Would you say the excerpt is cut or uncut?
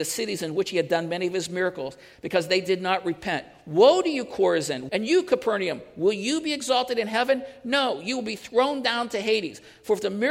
cut